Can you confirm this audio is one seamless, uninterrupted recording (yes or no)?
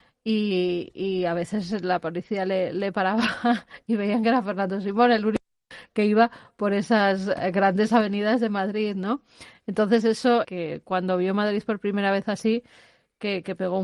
no